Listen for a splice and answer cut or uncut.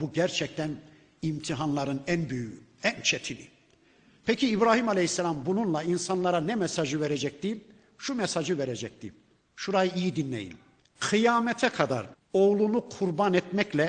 uncut